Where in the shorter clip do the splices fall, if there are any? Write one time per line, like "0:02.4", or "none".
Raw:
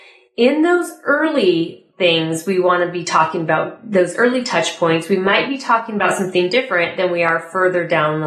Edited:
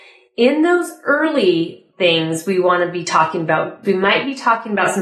0:03.8